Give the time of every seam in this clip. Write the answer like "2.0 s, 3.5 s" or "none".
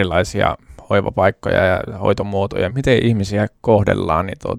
2.7 s